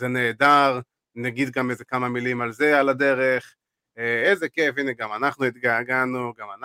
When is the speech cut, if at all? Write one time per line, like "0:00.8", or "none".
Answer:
none